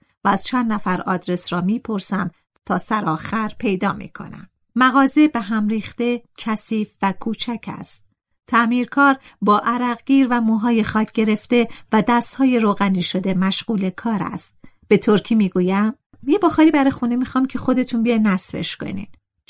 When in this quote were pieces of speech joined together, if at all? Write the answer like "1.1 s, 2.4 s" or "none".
none